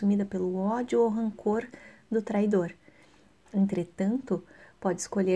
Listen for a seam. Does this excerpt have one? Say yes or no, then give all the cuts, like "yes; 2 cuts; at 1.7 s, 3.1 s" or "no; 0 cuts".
no; 0 cuts